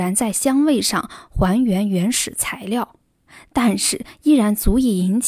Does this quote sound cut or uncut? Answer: uncut